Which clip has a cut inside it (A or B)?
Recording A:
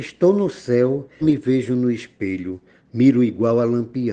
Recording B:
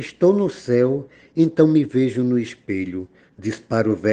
A